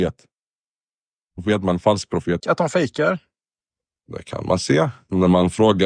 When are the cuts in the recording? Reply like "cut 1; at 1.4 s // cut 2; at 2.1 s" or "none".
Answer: cut 1; at 2.4 s